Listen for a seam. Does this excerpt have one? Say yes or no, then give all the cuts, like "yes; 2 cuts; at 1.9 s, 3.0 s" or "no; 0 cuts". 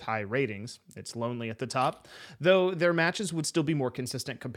no; 0 cuts